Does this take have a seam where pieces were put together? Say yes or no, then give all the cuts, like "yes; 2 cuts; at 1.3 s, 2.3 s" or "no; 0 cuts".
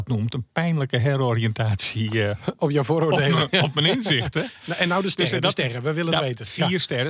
no; 0 cuts